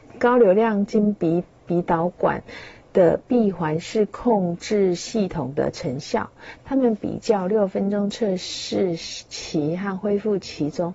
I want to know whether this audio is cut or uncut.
uncut